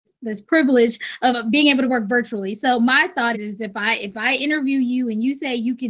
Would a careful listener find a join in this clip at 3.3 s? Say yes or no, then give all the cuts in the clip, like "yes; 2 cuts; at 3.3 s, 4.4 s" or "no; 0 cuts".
yes; 1 cut; at 3.3 s